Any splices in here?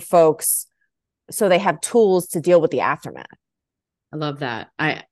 no; 0 cuts

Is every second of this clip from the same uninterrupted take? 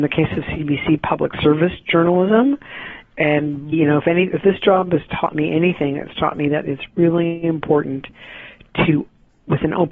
no; 1 cut; at 3.7 s

